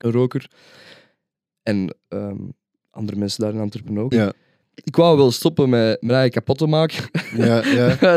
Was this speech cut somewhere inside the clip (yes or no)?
yes